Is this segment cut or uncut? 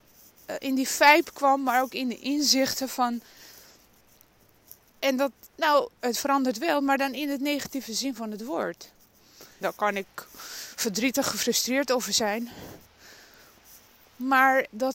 cut